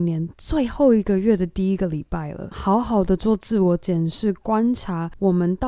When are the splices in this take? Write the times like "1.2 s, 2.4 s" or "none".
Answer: 2.5 s